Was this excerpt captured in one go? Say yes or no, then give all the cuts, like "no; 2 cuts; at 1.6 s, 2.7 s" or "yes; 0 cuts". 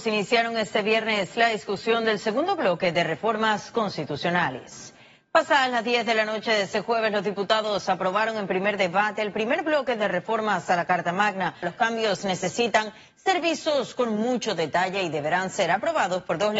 no; 1 cut; at 11.6 s